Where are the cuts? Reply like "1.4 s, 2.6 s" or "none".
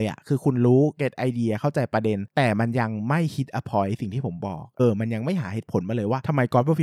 4.8 s